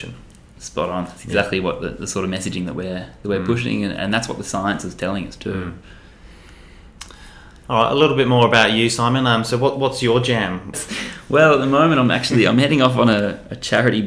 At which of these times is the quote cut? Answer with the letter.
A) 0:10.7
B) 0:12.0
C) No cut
A